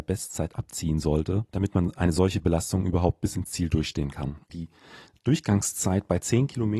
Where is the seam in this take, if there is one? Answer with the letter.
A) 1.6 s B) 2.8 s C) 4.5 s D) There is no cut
C